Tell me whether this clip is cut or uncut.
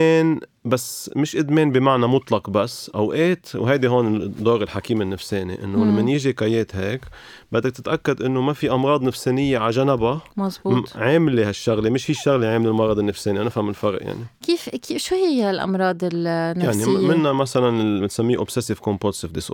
uncut